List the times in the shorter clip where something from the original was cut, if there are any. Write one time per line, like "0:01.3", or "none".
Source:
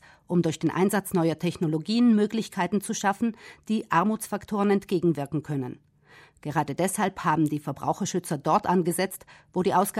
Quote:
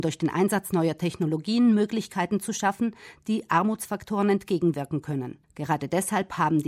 0:05.4